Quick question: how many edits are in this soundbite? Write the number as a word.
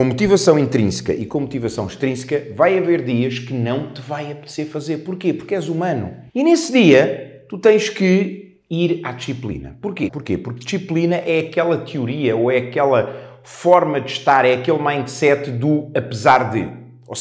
two